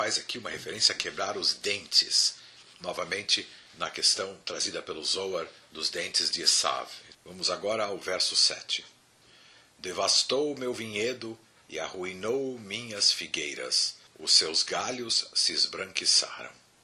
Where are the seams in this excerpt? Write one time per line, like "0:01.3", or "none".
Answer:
0:07.1
0:14.0